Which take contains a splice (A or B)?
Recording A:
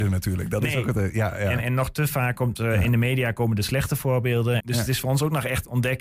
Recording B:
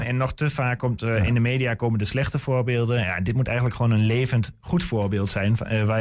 A